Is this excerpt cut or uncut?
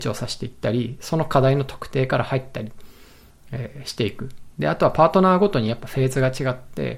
uncut